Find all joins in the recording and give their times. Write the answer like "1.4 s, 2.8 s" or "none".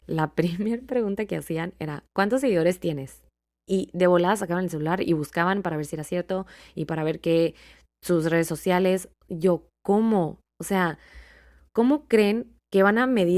none